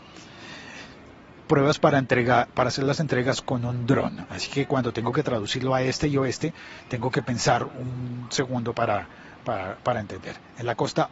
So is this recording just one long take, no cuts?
no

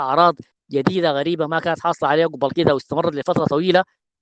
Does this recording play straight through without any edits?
yes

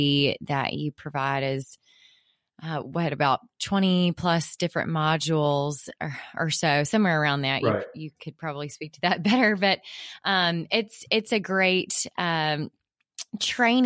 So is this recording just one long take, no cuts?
yes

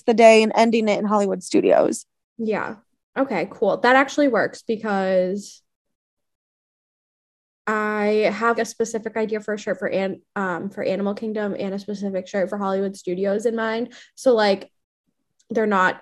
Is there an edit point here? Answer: yes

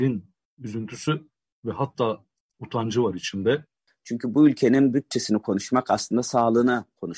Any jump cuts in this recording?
yes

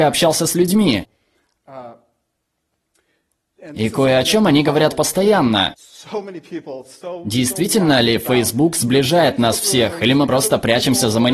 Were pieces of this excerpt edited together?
no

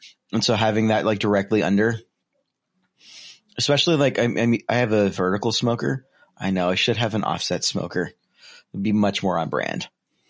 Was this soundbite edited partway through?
no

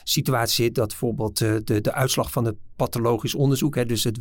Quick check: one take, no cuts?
yes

